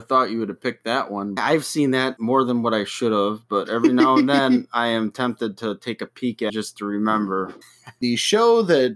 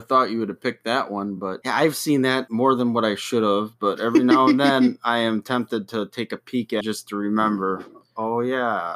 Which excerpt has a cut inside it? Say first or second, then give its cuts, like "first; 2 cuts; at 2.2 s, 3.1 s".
first; 2 cuts; at 1.4 s, 7.6 s